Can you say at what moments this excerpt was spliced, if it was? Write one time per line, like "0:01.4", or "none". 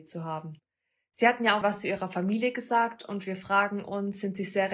0:01.6